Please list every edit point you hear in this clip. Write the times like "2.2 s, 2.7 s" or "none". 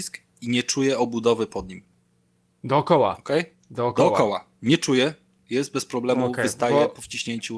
none